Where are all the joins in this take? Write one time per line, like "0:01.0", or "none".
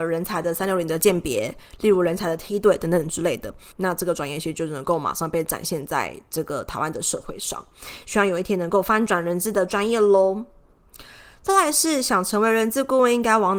0:03.7